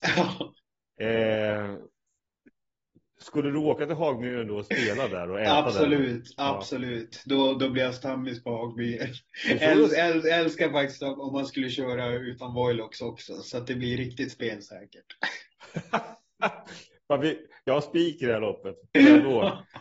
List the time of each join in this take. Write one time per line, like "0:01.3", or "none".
none